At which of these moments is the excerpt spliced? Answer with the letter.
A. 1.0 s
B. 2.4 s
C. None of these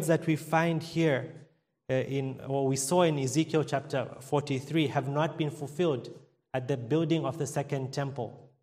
C